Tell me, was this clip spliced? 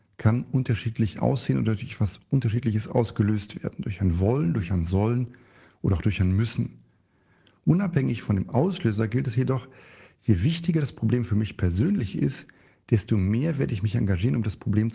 no; 0 cuts

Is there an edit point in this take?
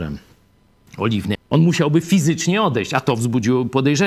yes; 1 cut; at 1.4 s

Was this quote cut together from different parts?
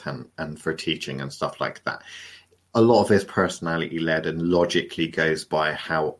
no; 0 cuts

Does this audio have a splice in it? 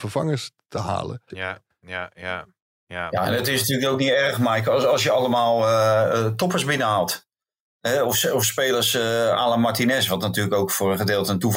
yes; 1 cut; at 1.3 s

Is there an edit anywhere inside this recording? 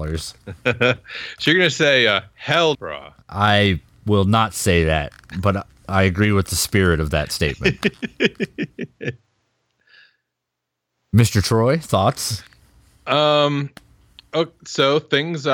yes; 1 cut; at 2.7 s

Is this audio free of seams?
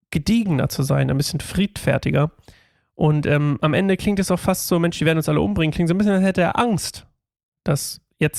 yes; 0 cuts

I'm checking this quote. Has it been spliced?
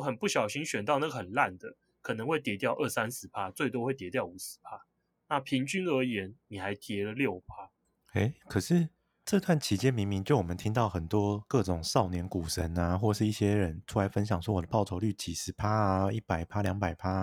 no; 0 cuts

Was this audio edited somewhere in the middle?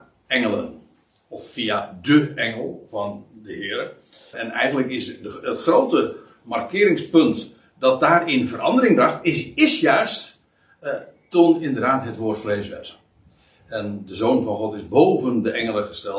yes; 1 cut; at 4.3 s

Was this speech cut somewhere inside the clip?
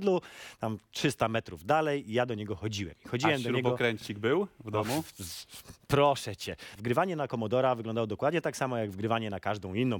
no; 0 cuts

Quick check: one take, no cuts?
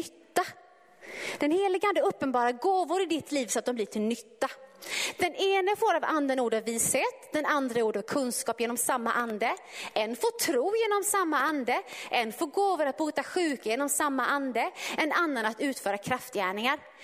yes; 0 cuts

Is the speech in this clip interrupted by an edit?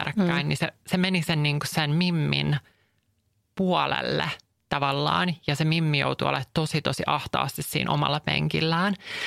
no; 0 cuts

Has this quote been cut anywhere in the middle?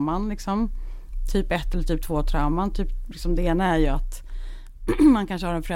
no; 0 cuts

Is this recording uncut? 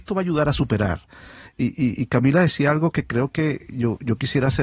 yes; 0 cuts

